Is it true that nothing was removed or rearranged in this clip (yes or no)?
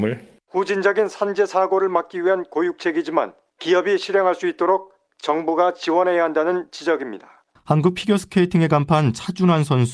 no